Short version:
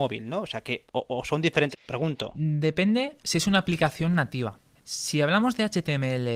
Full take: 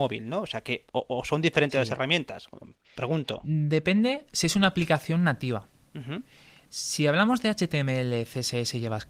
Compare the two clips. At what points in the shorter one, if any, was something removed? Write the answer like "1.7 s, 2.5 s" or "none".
1.7 s, 4.7 s